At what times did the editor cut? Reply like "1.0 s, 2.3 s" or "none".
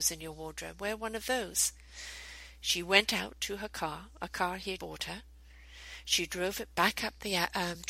4.8 s